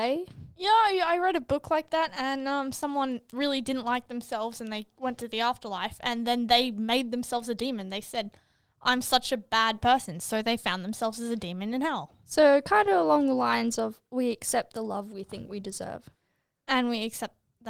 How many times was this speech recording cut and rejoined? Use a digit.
0